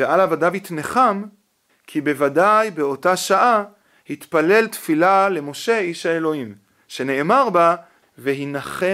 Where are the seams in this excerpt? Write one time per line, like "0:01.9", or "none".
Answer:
0:01.7
0:08.0